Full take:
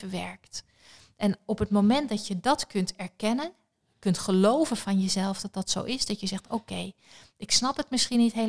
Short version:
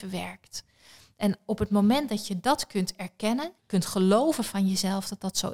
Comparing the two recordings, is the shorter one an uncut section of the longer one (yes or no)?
no